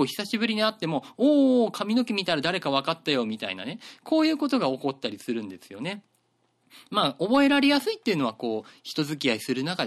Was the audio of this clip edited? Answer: no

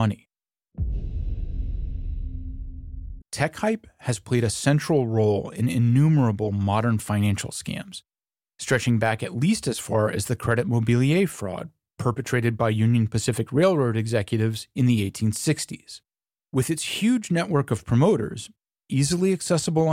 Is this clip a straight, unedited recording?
no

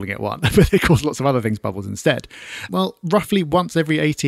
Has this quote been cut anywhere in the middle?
yes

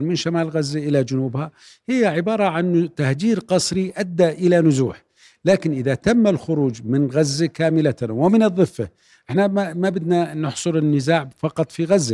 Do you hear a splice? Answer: no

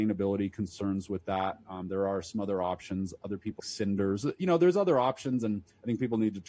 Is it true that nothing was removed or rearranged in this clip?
no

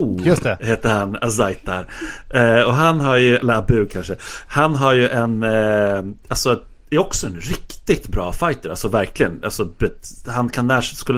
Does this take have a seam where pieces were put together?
no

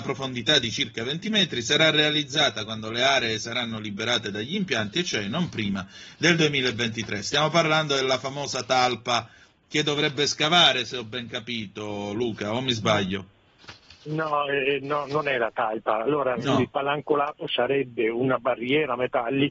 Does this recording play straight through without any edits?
yes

